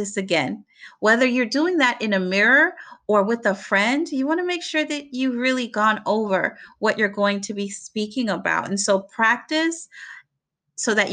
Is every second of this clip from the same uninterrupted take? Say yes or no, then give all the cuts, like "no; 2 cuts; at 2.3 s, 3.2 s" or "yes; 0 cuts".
yes; 0 cuts